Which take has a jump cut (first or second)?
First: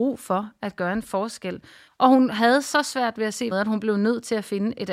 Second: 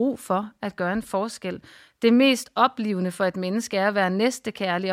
first